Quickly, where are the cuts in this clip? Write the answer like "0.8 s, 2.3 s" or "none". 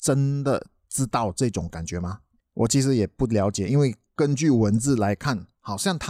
none